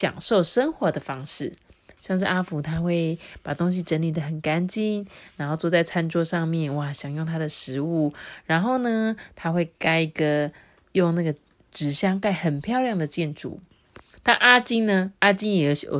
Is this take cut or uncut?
uncut